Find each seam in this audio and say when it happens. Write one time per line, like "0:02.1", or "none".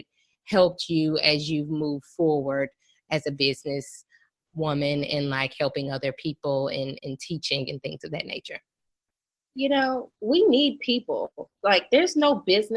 0:07.0

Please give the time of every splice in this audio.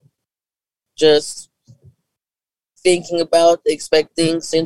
none

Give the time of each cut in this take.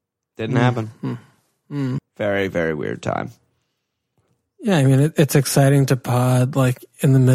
0:02.0

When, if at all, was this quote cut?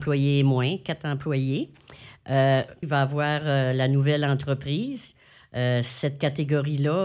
0:02.8

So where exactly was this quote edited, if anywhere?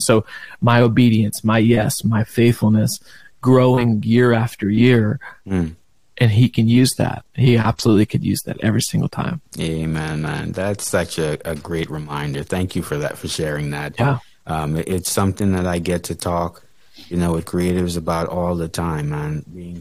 none

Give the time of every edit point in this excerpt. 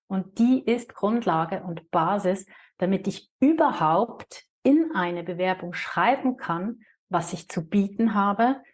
none

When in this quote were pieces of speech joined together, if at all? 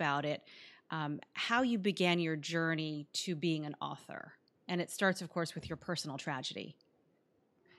none

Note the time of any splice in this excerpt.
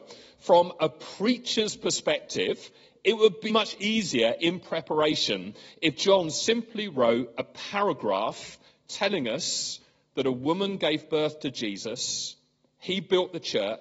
0:03.5

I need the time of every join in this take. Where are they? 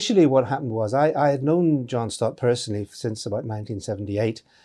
none

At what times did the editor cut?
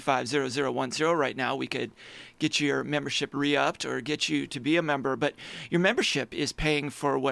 none

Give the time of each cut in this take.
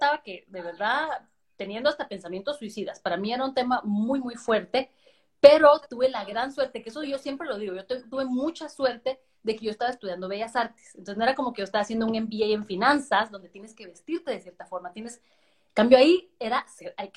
none

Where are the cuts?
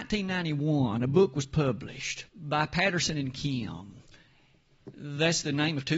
0:02.3

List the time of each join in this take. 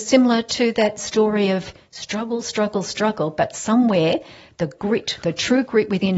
none

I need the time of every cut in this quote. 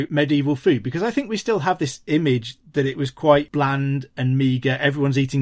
none

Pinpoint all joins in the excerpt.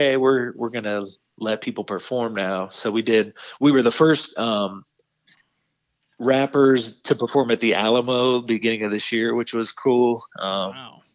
none

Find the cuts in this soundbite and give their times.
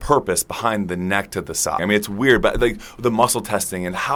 0:01.8

